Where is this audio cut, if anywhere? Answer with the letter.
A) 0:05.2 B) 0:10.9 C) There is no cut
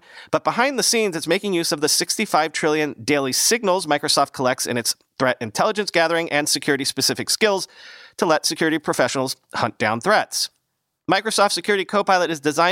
C